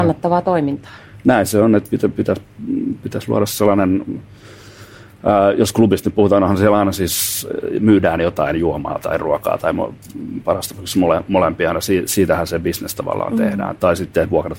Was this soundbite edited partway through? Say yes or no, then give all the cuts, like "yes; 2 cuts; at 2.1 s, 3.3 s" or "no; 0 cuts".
no; 0 cuts